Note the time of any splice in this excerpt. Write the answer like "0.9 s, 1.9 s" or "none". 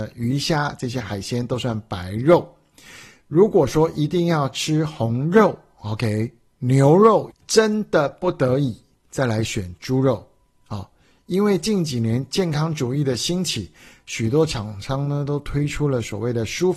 7.3 s